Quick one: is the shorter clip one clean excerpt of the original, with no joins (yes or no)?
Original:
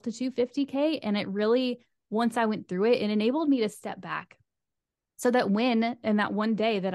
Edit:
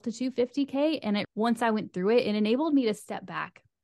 no